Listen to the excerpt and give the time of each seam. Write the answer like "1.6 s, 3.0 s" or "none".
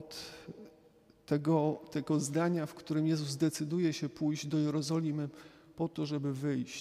none